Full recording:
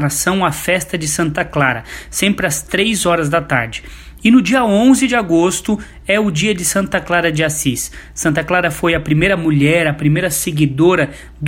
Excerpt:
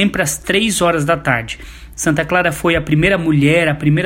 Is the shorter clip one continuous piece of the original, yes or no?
no